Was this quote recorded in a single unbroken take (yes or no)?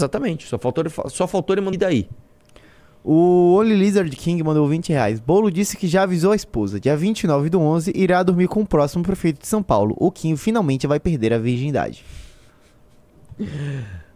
no